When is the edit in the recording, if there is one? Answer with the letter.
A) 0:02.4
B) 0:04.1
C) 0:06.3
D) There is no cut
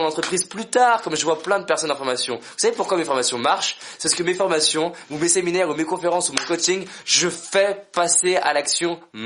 D